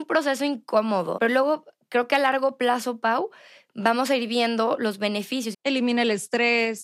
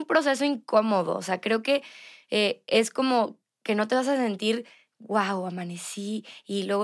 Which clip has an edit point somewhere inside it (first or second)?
first